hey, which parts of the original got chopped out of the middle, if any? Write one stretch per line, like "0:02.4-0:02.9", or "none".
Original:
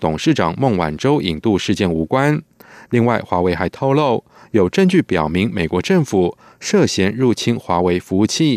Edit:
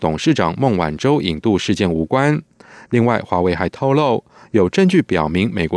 none